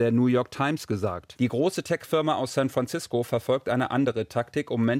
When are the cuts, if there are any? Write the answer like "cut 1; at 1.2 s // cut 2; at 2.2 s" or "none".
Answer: cut 1; at 1.4 s

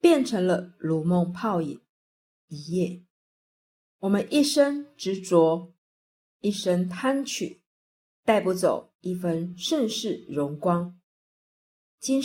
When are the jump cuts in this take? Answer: cut 1; at 2.4 s

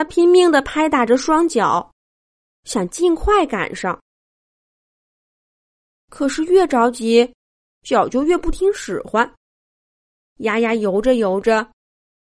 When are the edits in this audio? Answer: none

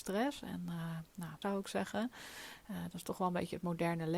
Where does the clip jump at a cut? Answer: cut 1; at 1.4 s

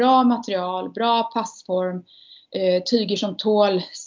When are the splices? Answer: none

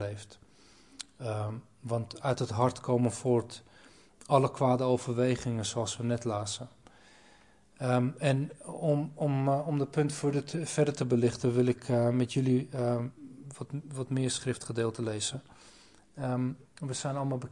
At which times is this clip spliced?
none

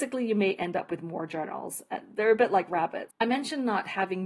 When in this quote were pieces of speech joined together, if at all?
cut 1; at 3.1 s

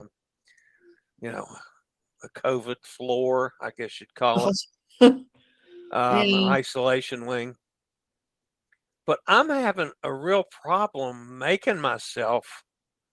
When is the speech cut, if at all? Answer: none

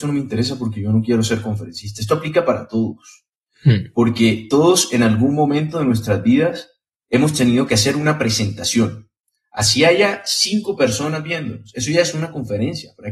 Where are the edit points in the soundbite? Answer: none

